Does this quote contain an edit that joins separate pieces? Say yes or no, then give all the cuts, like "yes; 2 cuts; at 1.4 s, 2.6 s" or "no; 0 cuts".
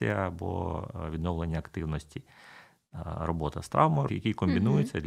yes; 1 cut; at 4.1 s